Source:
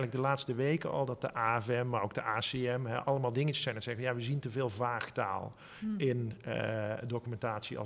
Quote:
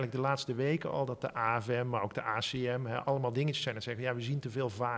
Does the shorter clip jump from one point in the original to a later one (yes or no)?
no